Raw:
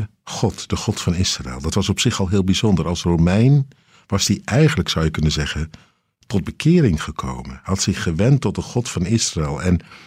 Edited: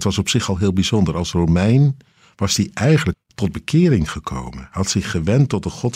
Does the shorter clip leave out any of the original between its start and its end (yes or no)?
yes